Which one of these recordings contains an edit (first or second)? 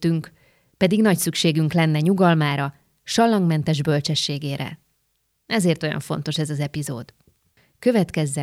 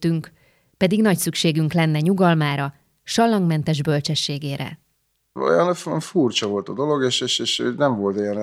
second